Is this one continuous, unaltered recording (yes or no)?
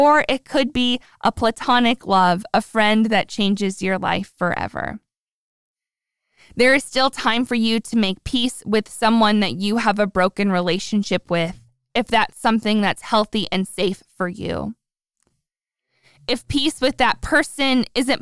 yes